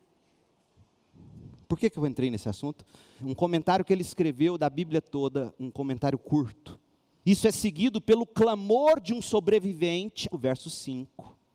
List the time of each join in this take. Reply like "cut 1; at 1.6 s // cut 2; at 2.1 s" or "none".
cut 1; at 3.2 s // cut 2; at 7.2 s // cut 3; at 10.3 s

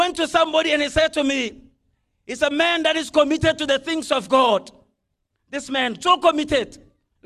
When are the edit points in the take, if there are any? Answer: none

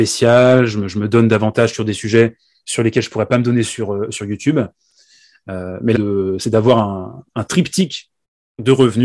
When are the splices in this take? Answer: cut 1; at 5.9 s

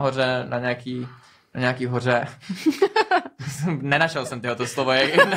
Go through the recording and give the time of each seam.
none

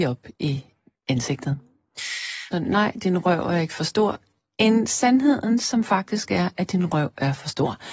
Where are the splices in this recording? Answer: cut 1; at 2.5 s

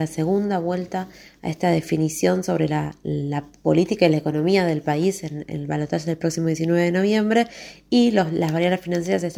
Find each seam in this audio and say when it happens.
none

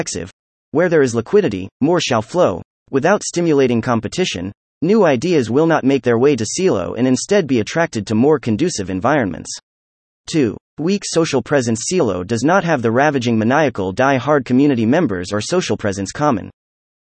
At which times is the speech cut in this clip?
cut 1; at 2.8 s

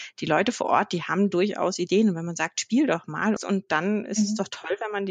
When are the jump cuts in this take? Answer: cut 1; at 3.4 s

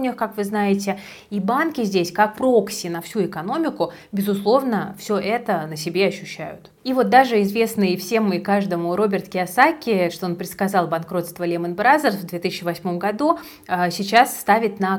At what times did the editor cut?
cut 1; at 2.3 s // cut 2; at 6.8 s // cut 3; at 10.1 s

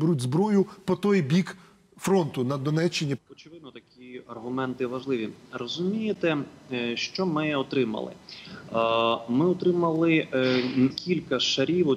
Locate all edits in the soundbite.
cut 1; at 3.2 s // cut 2; at 10.9 s

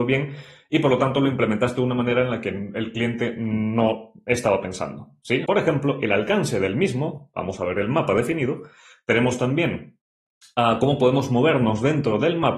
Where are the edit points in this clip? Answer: cut 1; at 5.4 s

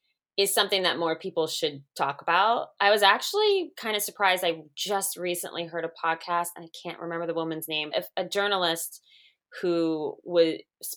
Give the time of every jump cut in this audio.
cut 1; at 7.9 s

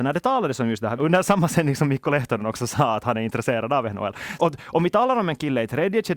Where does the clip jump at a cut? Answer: cut 1; at 1.0 s // cut 2; at 4.4 s

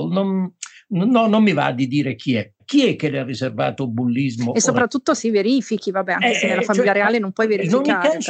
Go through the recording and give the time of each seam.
cut 1; at 2.6 s

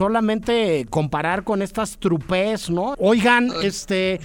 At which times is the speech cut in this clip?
cut 1; at 2.9 s

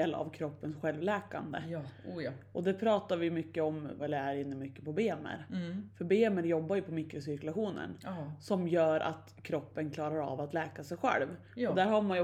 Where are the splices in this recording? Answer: cut 1; at 4.0 s

